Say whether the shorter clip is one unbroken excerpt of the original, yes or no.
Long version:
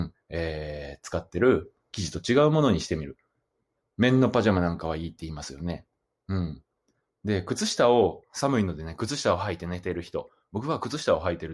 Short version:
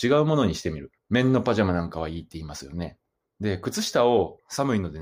no